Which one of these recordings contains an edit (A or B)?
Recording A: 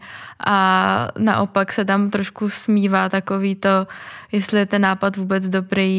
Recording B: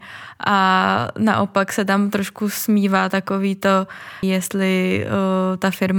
B